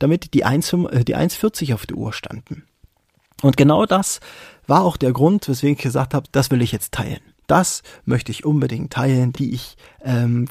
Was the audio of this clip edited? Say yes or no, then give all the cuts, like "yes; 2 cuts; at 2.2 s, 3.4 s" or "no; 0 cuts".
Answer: yes; 2 cuts; at 6.2 s, 9.3 s